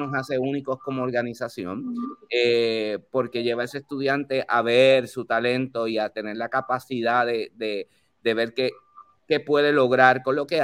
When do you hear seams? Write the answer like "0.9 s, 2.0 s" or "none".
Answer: none